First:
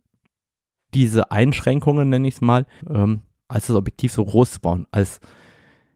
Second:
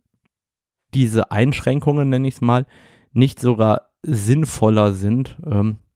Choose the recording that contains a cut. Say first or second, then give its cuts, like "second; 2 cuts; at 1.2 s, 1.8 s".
first; 1 cut; at 2.8 s